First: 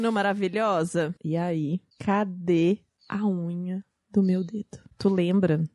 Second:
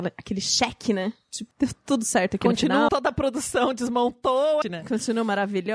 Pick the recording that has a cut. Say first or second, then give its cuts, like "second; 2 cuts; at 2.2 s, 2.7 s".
second; 3 cuts; at 1.5 s, 2.9 s, 4.6 s